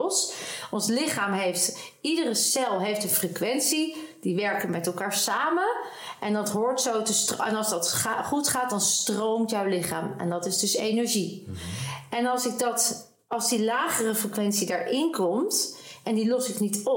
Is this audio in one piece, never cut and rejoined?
yes; 0 cuts

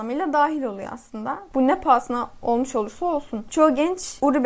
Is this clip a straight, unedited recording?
no; 1 cut; at 1.5 s

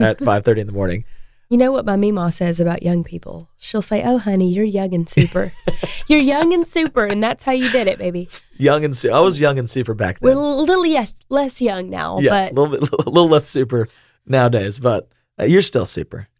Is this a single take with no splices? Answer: yes; 0 cuts

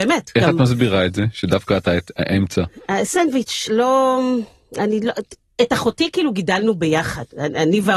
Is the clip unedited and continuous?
no; 1 cut; at 3.7 s

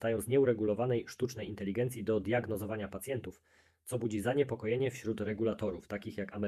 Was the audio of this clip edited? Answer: no; 0 cuts

